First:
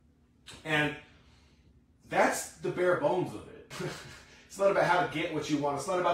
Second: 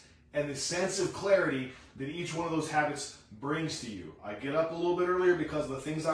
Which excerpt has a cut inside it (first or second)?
first